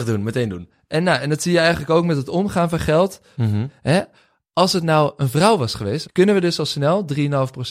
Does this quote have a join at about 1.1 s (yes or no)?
no